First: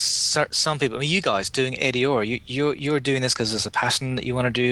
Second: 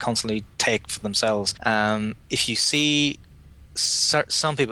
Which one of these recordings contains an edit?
second; 1 cut; at 1.5 s

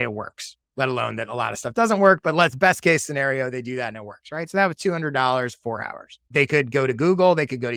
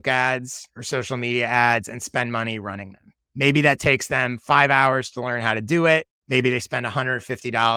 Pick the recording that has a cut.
first; 1 cut; at 6.3 s

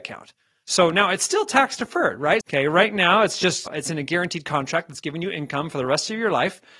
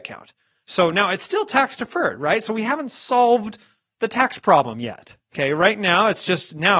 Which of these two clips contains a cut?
first; 2 cuts; at 2.4 s, 3.7 s

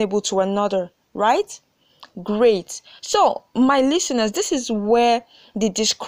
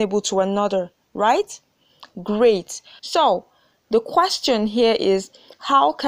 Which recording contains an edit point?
second; 1 cut; at 3.0 s

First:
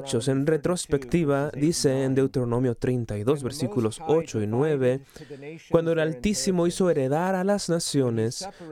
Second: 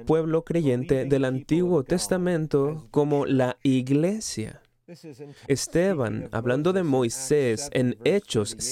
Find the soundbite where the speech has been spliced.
second; 1 cut; at 5.5 s

